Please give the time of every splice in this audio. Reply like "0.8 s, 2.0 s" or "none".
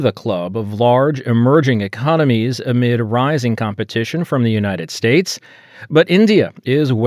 none

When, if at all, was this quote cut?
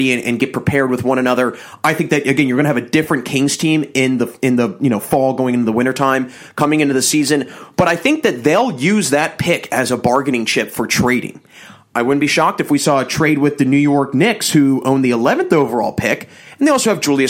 none

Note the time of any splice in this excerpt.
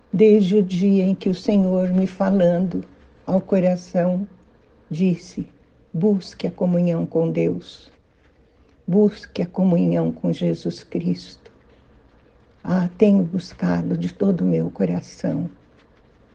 4.8 s

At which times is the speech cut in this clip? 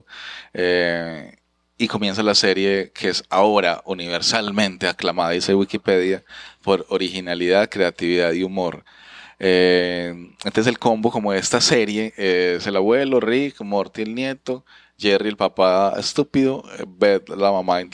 none

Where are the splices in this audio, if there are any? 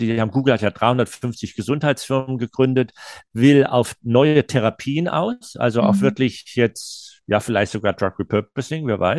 none

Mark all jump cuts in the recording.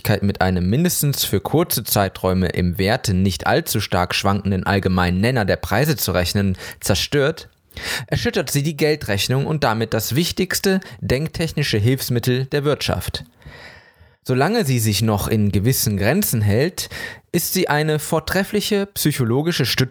none

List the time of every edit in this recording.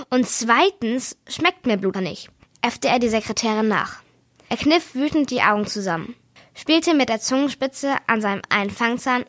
1.9 s

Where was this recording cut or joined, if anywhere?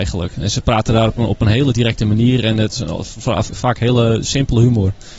3.5 s

